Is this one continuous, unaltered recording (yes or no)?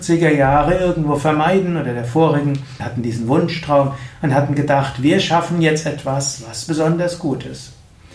no